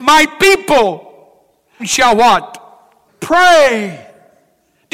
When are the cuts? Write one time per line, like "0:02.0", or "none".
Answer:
0:01.8
0:03.1